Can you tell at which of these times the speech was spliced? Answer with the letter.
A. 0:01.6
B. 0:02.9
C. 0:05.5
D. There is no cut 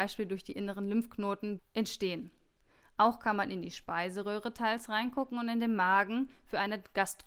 A